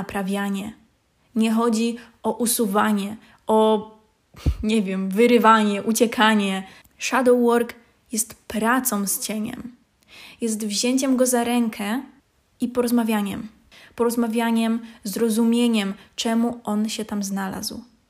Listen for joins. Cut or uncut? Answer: uncut